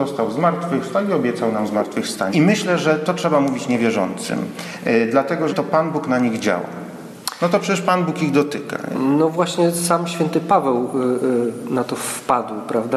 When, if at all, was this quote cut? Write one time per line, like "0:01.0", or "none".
0:02.3
0:05.5